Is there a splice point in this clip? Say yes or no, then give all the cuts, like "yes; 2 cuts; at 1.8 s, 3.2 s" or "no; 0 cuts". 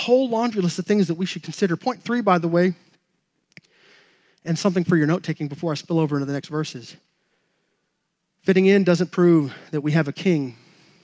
no; 0 cuts